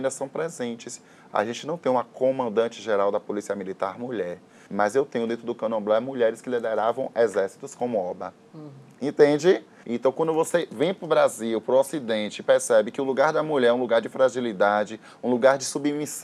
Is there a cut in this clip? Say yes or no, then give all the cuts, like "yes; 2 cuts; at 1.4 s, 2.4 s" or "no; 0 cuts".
yes; 2 cuts; at 4.7 s, 9.8 s